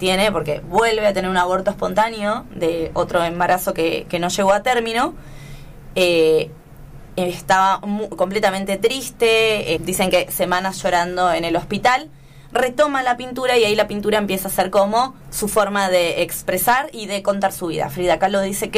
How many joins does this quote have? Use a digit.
2